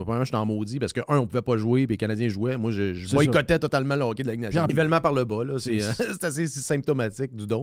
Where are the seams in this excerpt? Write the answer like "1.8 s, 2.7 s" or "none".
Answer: 4.7 s